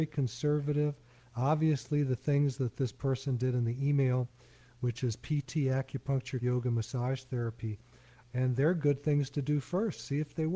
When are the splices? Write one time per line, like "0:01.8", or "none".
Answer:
0:06.4
0:08.2